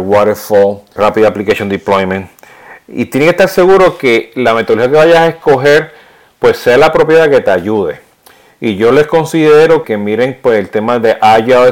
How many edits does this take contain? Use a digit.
2